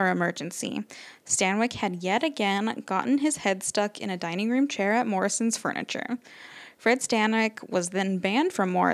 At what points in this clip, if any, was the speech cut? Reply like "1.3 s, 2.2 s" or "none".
none